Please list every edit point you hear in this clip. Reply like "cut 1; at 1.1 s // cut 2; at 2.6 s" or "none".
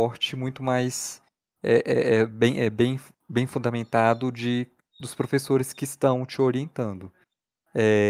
none